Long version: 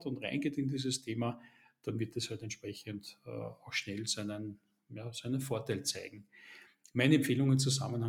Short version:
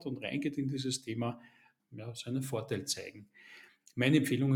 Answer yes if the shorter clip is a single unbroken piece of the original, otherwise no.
no